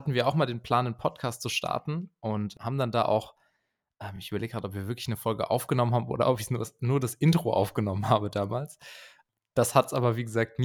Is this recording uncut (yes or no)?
yes